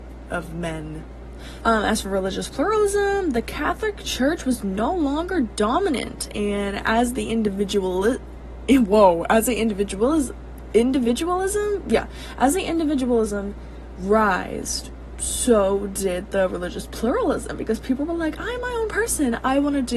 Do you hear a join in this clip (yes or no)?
yes